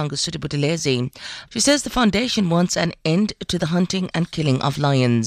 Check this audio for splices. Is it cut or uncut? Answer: cut